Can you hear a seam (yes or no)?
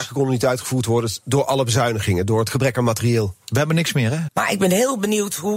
yes